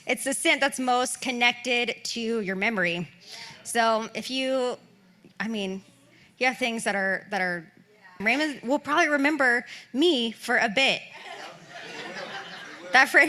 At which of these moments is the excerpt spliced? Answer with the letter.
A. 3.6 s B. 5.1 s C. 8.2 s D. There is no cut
C